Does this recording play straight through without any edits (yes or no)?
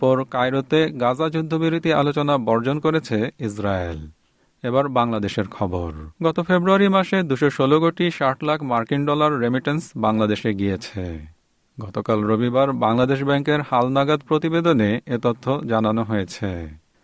no